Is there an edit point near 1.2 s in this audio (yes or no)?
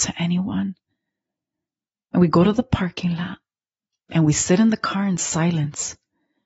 no